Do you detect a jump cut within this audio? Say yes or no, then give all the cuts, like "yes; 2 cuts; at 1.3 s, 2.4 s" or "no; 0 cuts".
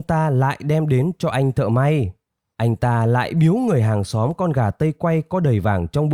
yes; 1 cut; at 2.5 s